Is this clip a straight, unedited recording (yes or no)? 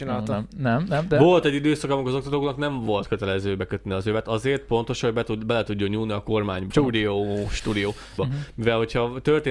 no